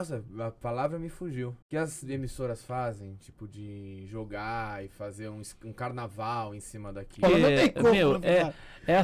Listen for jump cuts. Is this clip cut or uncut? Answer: cut